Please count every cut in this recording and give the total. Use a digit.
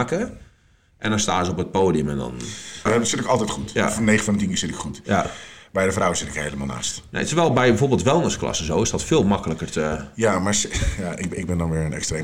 1